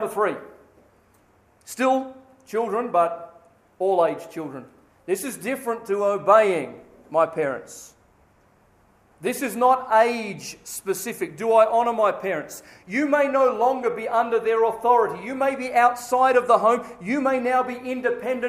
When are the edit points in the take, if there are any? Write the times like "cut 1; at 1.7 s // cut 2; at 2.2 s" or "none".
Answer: cut 1; at 5.0 s